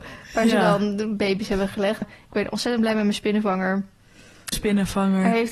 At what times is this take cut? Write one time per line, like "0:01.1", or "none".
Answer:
0:02.0
0:04.5